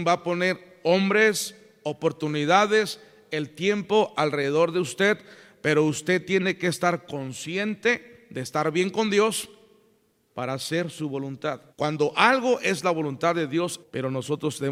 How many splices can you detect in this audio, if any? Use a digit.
2